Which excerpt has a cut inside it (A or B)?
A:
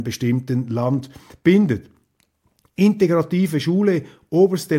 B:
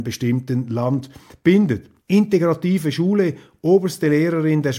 B